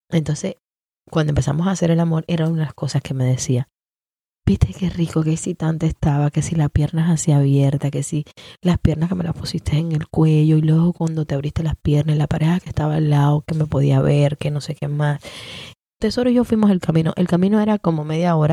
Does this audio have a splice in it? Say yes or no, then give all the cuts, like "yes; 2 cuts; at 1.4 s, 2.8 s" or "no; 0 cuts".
yes; 1 cut; at 16.0 s